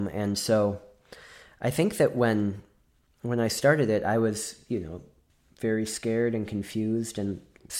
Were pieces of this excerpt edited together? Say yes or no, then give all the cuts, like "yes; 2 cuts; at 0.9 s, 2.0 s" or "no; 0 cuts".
no; 0 cuts